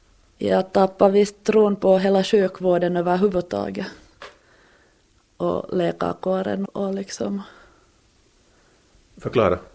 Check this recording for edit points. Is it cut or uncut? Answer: cut